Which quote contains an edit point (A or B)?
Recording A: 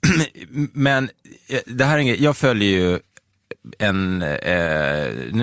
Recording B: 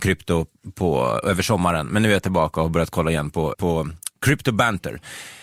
B